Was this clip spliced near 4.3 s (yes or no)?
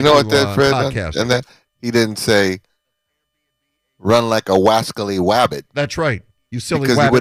no